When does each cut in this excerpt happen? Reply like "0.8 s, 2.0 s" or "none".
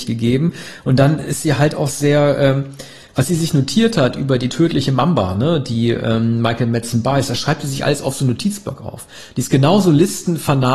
none